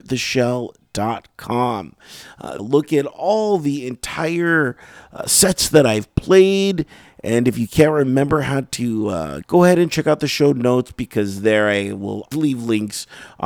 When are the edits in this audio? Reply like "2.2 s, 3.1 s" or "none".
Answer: 2.6 s, 9.4 s, 12.3 s

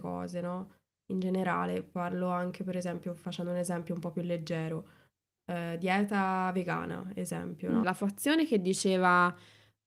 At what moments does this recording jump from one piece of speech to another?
7.8 s

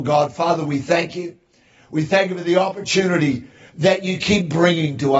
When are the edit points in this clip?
none

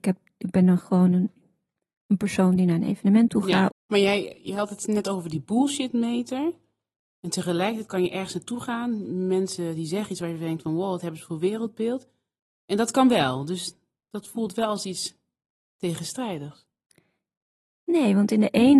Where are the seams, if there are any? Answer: 3.7 s

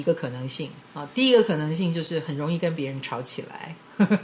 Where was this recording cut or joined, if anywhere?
none

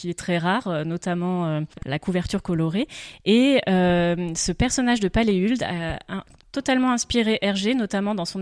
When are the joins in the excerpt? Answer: none

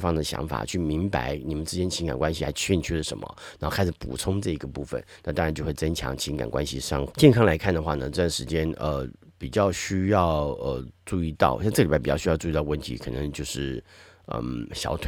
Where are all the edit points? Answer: 7.1 s

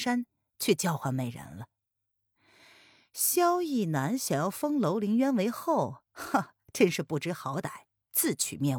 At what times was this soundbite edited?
none

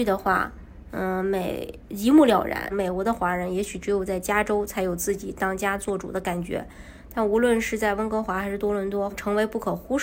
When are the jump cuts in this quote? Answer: 2.7 s, 9.1 s

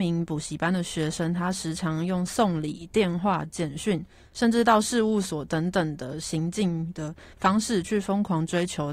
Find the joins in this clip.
none

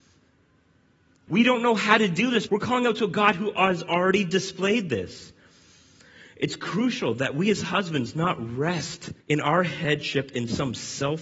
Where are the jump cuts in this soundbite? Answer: 1.3 s, 2.5 s, 9.2 s

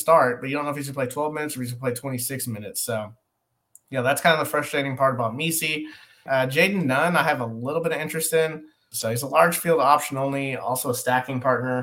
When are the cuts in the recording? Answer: 6.3 s, 8.9 s

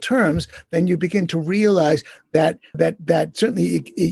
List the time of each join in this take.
2.7 s

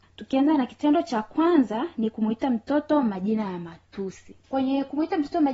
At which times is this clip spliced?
4.4 s

